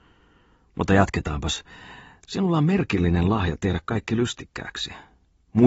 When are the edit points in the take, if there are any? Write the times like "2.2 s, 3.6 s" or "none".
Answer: 2.2 s